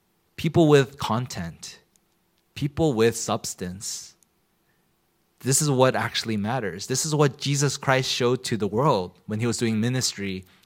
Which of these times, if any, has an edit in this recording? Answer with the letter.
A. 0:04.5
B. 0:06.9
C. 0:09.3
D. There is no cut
D